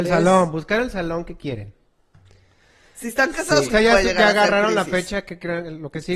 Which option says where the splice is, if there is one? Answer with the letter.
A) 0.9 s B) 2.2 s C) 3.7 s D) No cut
C